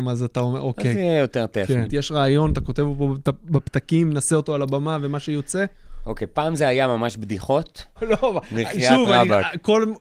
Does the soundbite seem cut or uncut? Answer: cut